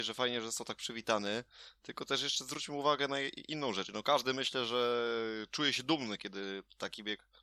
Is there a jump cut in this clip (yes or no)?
yes